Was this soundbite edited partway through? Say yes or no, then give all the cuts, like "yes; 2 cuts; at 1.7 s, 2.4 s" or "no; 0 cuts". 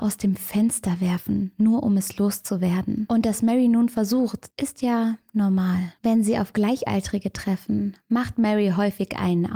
yes; 2 cuts; at 4.5 s, 6.0 s